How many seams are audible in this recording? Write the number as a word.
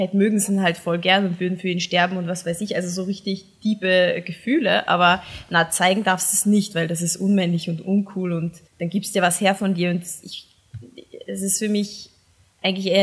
one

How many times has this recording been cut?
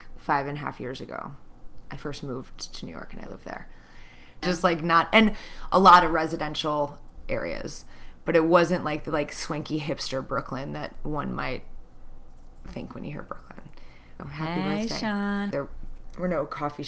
three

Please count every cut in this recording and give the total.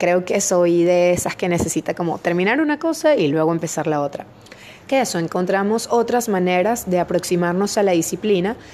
one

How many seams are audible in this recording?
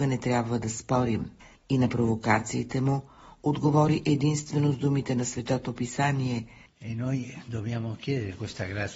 two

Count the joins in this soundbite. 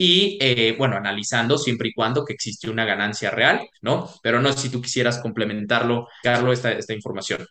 two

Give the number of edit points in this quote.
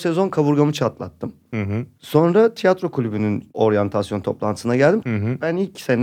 two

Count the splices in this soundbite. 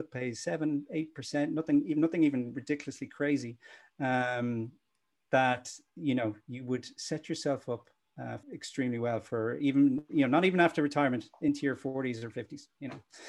one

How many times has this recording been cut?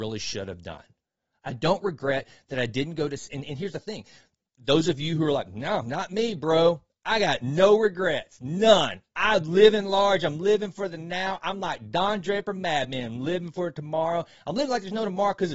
zero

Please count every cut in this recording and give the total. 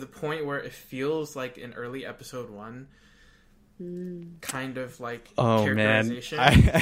zero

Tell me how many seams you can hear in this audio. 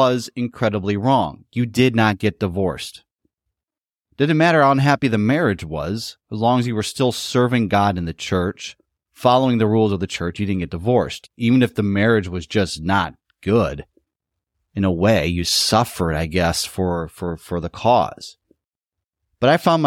zero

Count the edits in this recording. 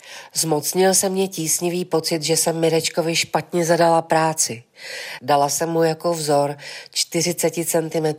one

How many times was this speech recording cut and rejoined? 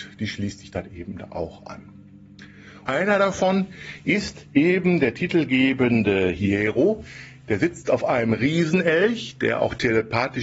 one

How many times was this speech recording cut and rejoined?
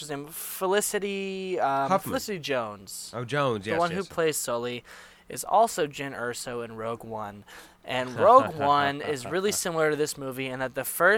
zero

